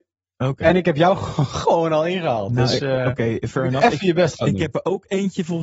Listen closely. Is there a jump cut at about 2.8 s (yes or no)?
no